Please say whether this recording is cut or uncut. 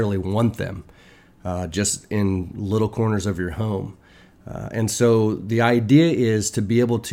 uncut